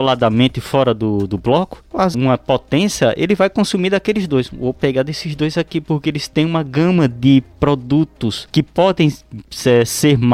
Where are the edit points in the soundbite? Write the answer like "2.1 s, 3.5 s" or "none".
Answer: 2.1 s